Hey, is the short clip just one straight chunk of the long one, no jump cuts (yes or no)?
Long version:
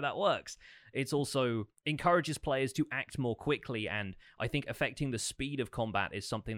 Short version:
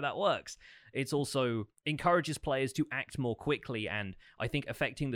yes